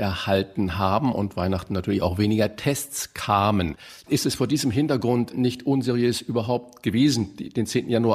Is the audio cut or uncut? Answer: cut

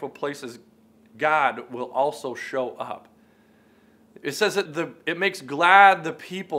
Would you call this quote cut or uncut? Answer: cut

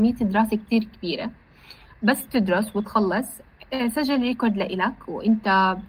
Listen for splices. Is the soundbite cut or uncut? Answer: uncut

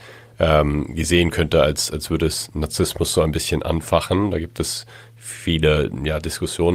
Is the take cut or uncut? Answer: uncut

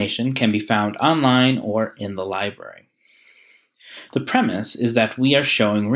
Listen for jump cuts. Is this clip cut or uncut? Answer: cut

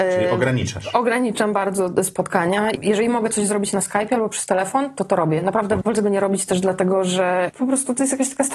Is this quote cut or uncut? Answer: cut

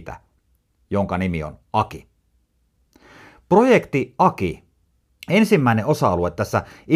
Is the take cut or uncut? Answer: cut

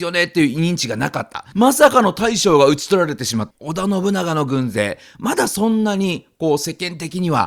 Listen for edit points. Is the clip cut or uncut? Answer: cut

